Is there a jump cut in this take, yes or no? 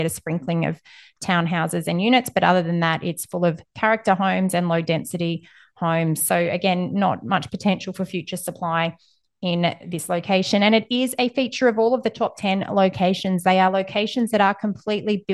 no